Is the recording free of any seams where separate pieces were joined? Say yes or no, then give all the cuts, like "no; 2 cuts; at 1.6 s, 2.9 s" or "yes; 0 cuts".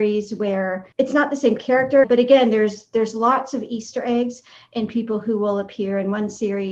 no; 2 cuts; at 0.9 s, 2.0 s